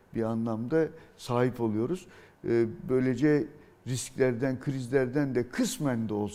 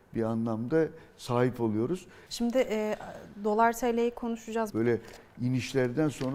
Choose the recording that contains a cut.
second; 2 cuts; at 2.3 s, 4.7 s

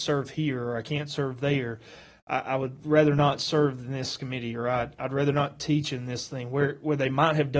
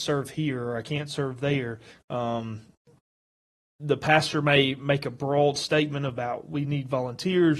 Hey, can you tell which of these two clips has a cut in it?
second; 1 cut; at 1.9 s

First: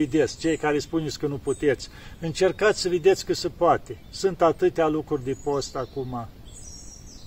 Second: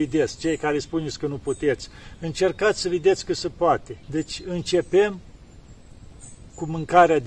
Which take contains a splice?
second; 1 cut; at 4.0 s

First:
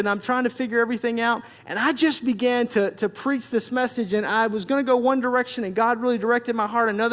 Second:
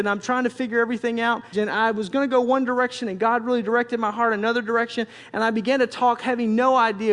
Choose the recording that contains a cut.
second; 1 cut; at 1.5 s

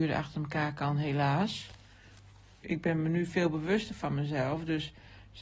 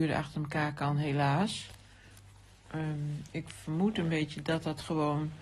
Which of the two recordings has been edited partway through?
first; 1 cut; at 2.6 s

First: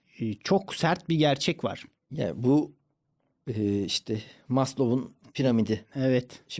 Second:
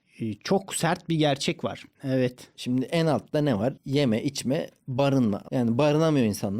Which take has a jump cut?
second; 2 cuts; at 1.9 s, 5.5 s

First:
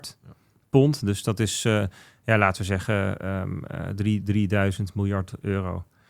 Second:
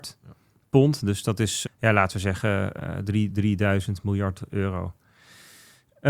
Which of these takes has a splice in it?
second; 2 cuts; at 1.6 s, 2.8 s

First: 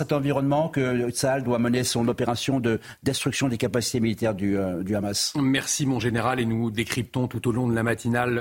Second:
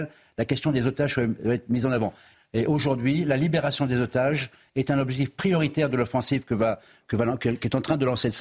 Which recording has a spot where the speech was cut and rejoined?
second; 1 cut; at 2.3 s

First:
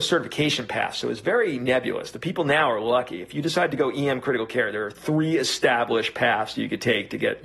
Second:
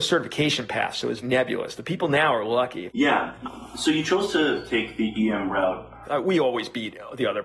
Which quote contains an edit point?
second; 3 cuts; at 1.2 s, 2.9 s, 6.0 s

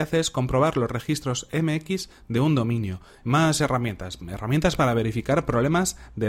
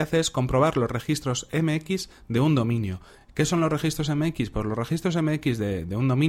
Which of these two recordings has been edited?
first; 1 cut; at 3.2 s

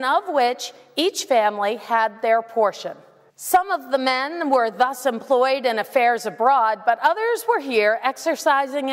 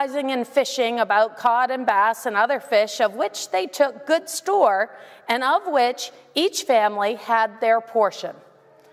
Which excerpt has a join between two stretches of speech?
first; 1 cut; at 3.3 s

